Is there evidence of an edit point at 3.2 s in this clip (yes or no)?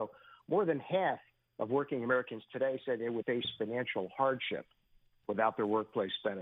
yes